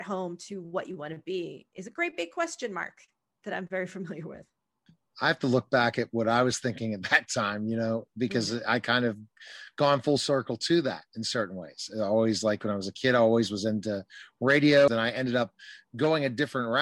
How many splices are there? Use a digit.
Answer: 1